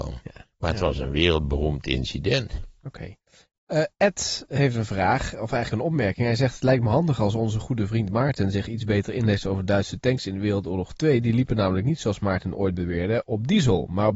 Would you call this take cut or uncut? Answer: uncut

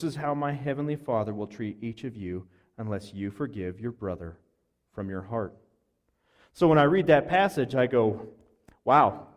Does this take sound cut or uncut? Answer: uncut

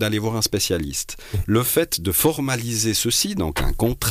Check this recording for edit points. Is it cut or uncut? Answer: cut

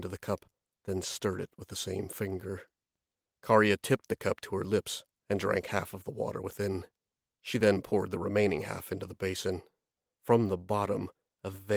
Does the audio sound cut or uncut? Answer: uncut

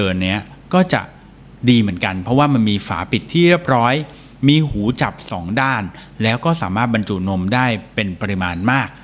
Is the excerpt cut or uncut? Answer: uncut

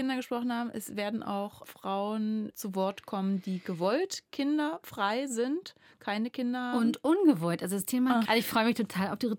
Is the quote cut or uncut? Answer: cut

